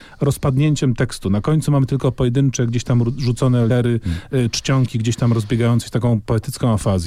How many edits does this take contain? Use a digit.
1